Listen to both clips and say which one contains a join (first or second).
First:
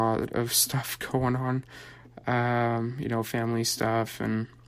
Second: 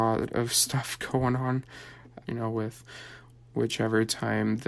second